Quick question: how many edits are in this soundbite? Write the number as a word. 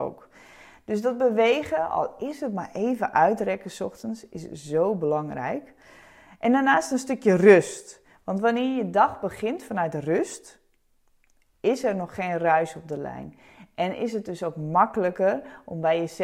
zero